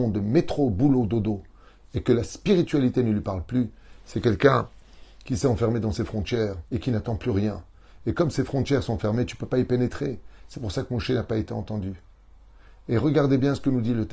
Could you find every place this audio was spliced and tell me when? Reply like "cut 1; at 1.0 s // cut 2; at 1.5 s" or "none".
cut 1; at 6.7 s